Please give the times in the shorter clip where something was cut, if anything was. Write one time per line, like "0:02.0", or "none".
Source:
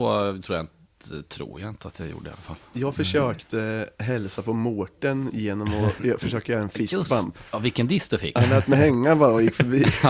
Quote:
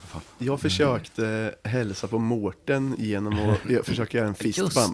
none